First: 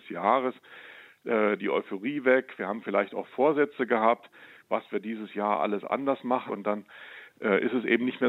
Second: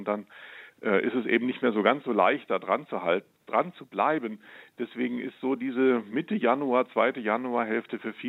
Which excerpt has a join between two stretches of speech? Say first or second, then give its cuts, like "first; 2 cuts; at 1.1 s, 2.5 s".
first; 2 cuts; at 1.6 s, 6.5 s